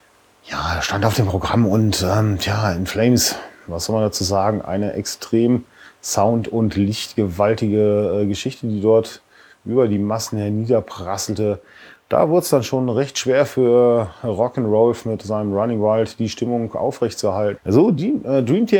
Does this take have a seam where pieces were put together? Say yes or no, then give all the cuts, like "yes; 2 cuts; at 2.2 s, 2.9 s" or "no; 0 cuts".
yes; 1 cut; at 17.6 s